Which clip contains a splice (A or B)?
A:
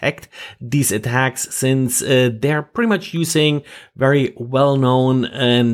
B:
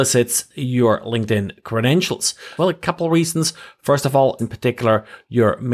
B